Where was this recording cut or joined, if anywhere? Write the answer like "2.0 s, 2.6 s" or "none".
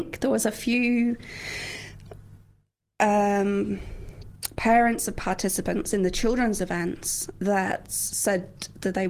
none